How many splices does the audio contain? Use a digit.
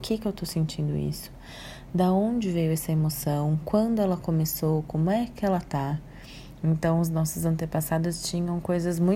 1